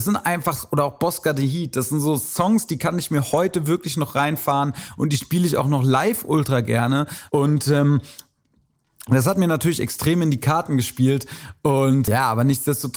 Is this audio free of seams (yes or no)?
no